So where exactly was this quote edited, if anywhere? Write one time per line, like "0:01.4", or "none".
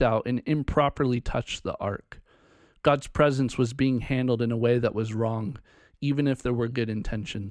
none

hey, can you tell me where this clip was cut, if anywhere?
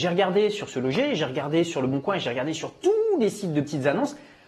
none

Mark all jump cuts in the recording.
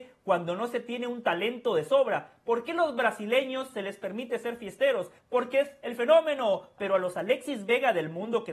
0:05.2
0:06.8

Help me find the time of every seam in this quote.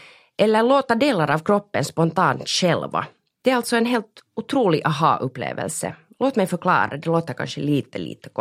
none

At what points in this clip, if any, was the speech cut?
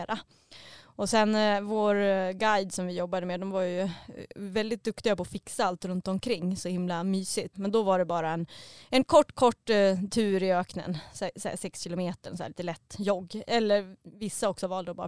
0:07.5

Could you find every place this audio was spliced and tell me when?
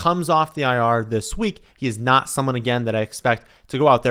0:01.7

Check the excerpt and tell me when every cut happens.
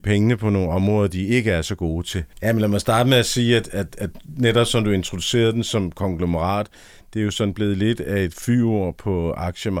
0:02.3

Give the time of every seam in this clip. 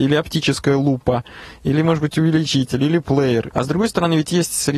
0:03.5

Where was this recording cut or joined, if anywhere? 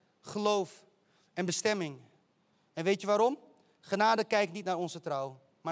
none

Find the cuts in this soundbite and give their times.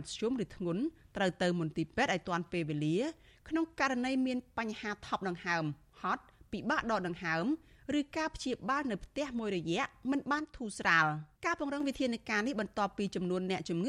0:11.3

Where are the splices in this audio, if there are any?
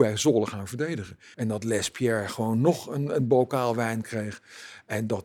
0:01.3

